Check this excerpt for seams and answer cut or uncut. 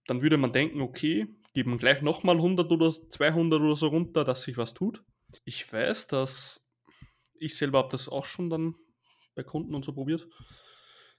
cut